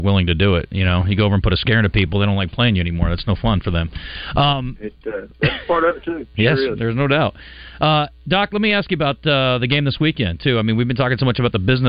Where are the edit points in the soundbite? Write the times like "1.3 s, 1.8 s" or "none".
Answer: none